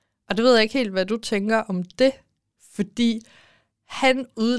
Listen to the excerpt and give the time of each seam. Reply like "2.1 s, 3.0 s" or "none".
none